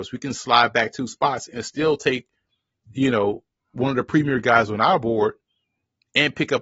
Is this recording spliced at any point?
no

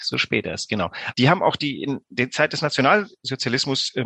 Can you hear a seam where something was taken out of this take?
yes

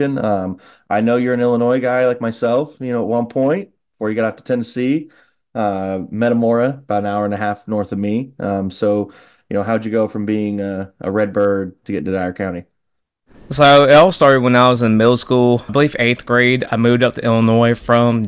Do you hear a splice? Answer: yes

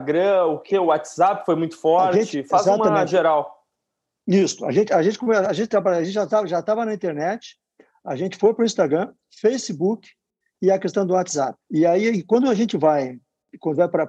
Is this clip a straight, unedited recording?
no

